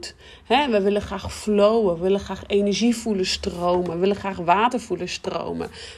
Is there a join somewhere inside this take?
no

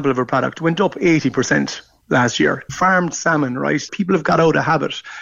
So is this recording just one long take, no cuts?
no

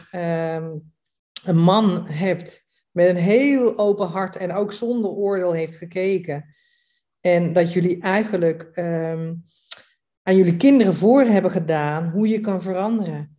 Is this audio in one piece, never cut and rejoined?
yes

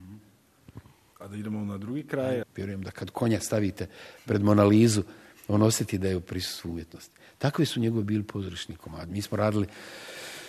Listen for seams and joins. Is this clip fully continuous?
no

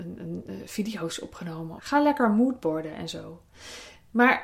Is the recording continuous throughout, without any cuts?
no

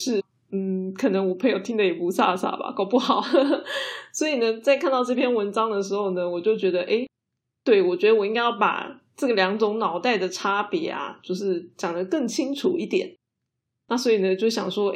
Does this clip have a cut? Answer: no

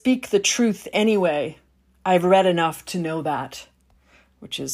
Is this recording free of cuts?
yes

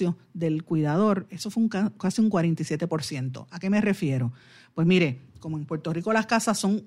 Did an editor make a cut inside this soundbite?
no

